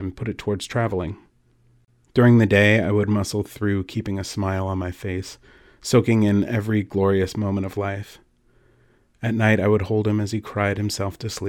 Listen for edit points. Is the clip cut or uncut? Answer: uncut